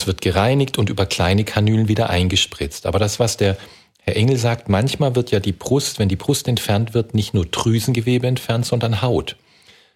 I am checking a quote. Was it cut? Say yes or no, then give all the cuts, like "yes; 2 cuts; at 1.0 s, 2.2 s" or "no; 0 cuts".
no; 0 cuts